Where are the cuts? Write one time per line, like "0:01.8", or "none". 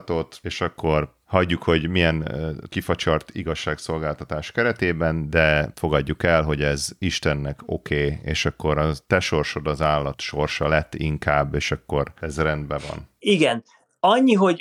none